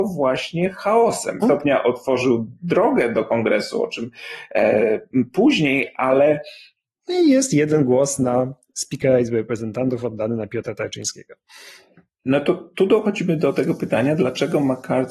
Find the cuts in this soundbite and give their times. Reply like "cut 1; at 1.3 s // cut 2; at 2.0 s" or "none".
cut 1; at 1.4 s // cut 2; at 7.0 s